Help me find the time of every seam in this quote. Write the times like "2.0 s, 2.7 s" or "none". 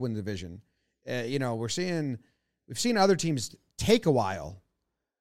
none